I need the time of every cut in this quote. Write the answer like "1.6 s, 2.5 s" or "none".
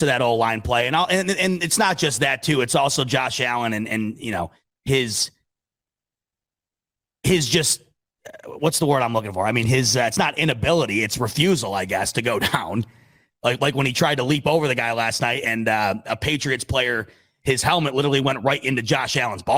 none

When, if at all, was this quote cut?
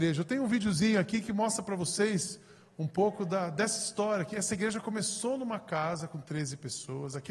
none

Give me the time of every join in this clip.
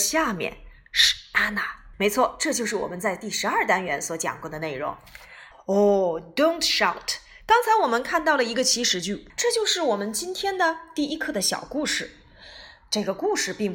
1.9 s, 5.5 s, 9.3 s

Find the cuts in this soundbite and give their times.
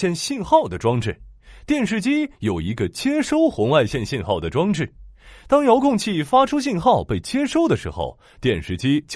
none

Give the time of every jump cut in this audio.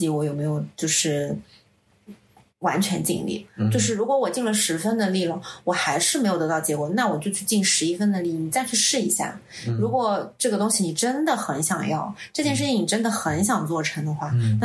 none

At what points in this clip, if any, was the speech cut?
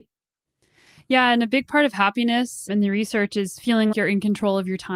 2.7 s, 3.9 s

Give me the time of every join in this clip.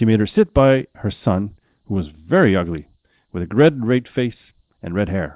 none

